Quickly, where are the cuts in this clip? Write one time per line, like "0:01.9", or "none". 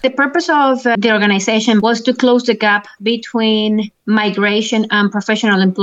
0:00.9